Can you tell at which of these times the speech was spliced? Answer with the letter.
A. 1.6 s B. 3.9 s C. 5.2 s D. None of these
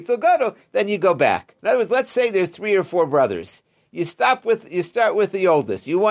A